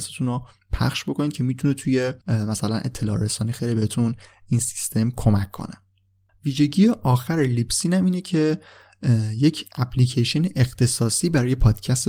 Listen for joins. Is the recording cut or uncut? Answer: cut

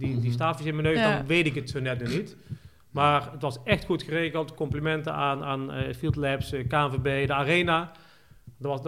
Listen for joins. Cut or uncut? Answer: uncut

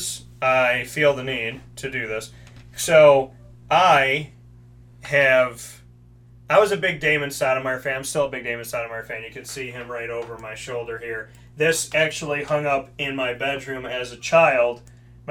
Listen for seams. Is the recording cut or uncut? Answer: uncut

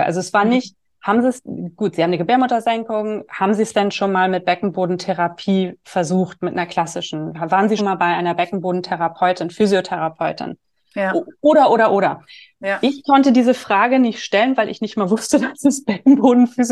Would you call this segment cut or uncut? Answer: cut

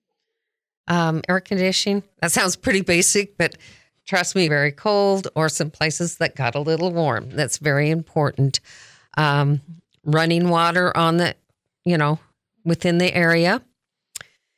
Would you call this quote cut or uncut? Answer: cut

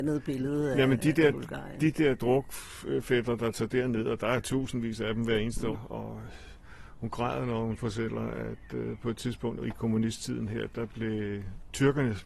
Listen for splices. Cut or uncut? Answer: cut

